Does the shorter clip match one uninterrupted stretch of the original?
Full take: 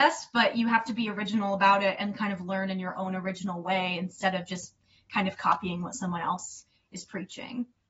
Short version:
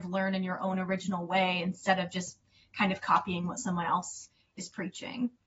yes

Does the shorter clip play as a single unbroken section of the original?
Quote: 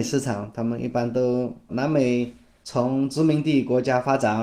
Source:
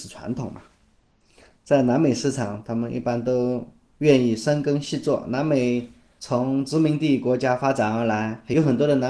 no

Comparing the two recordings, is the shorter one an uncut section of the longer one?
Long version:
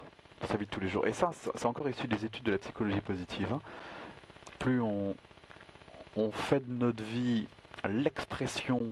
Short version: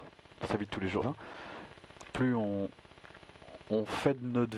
no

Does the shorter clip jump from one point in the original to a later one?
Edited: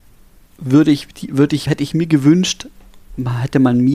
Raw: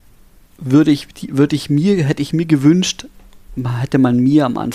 yes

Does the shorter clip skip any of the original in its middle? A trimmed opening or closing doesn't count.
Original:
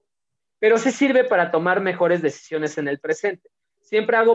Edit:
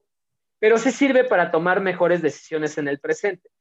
no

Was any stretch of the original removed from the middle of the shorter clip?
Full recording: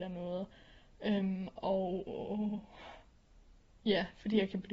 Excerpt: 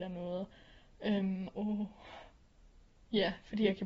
yes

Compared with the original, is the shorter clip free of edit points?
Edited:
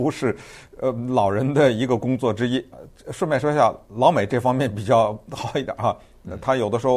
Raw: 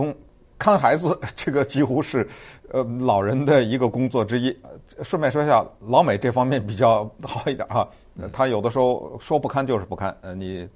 yes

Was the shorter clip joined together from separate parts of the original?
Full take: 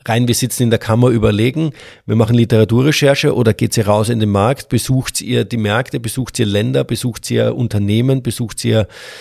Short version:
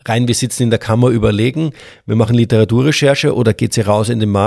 no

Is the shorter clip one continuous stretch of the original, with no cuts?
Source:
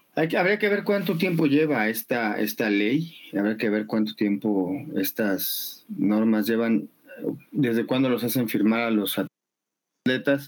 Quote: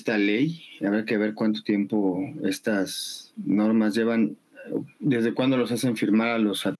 yes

